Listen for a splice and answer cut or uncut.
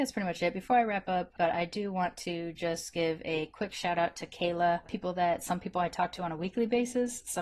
cut